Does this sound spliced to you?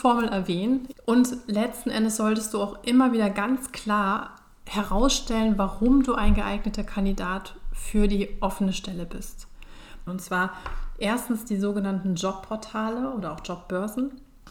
yes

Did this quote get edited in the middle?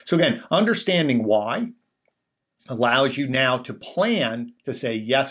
no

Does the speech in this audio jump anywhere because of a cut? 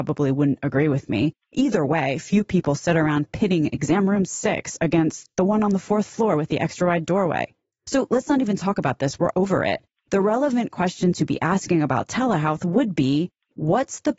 no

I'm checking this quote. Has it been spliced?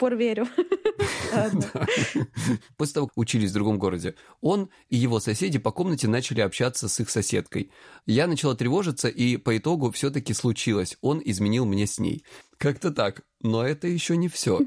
yes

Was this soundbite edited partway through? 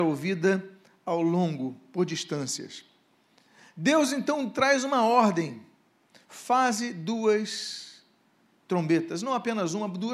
no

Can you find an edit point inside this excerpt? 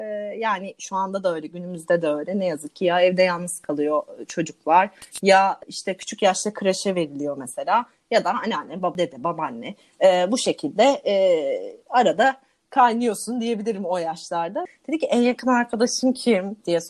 yes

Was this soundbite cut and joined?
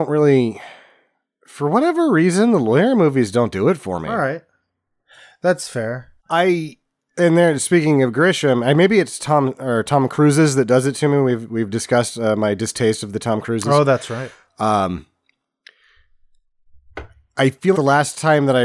yes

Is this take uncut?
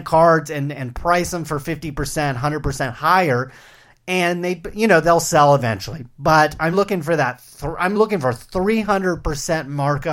no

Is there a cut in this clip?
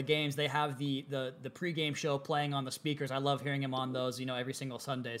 no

